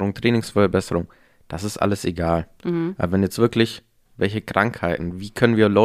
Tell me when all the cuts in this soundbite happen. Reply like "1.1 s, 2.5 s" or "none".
4.1 s